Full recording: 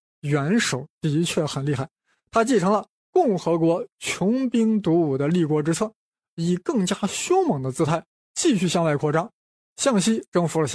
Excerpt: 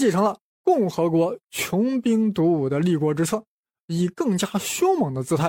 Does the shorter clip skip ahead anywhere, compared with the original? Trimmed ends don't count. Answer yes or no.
no